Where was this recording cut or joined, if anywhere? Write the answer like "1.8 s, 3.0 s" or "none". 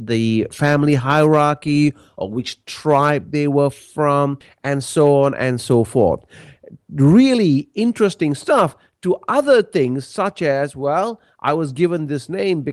none